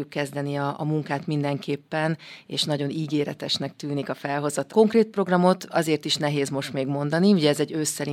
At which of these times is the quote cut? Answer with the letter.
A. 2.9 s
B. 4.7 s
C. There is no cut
B